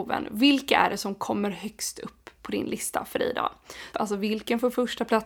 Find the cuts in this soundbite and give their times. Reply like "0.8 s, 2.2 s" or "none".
3.9 s

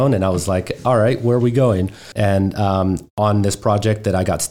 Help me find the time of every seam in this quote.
2.1 s

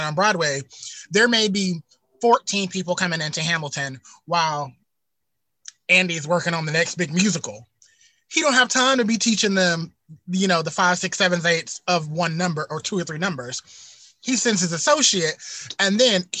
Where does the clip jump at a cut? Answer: none

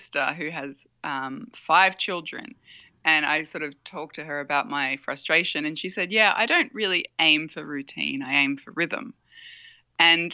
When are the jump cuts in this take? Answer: none

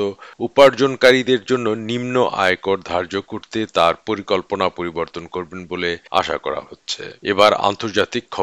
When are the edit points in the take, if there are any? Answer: 6.1 s, 7.2 s

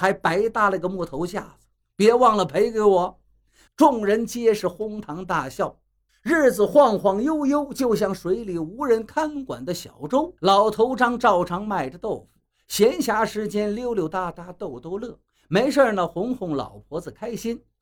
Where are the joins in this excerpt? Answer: 3.7 s, 6.1 s, 10.4 s

